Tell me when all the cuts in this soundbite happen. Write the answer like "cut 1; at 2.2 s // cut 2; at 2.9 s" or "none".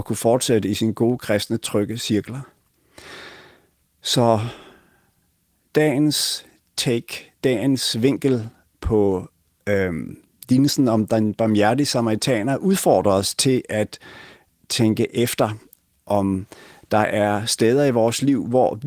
none